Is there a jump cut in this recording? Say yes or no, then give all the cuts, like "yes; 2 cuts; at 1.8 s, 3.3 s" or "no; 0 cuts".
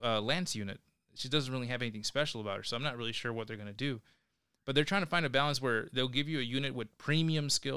no; 0 cuts